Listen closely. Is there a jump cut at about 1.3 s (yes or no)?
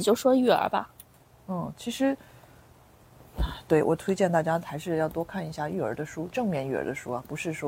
no